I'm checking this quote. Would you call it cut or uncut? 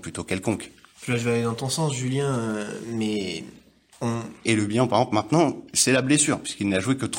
cut